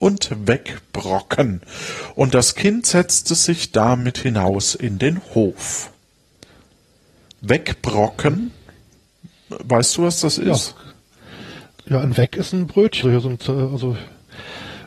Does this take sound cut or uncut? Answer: cut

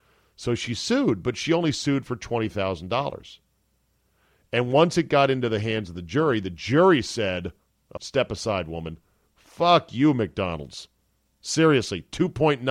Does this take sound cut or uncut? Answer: cut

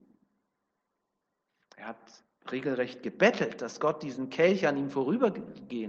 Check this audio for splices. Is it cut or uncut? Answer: uncut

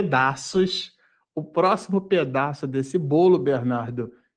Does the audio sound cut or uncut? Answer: uncut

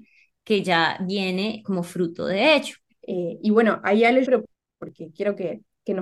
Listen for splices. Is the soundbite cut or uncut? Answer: cut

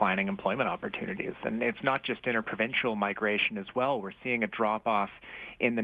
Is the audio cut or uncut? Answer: uncut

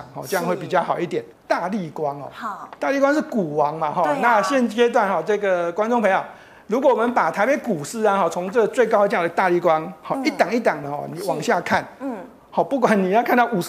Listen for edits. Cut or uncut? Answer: cut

